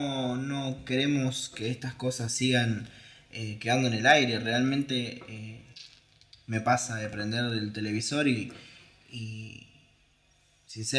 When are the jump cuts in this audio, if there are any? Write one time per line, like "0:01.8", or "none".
none